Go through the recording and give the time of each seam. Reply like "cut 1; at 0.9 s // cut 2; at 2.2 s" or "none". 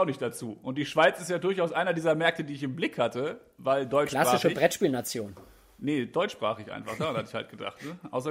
none